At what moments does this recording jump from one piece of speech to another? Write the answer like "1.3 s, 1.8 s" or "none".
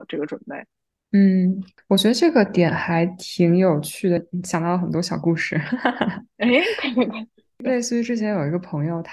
4.2 s